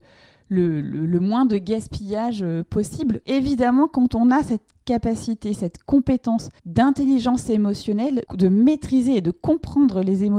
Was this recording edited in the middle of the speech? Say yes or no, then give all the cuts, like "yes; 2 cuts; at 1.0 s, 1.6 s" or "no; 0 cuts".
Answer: yes; 3 cuts; at 3.2 s, 6.6 s, 8.2 s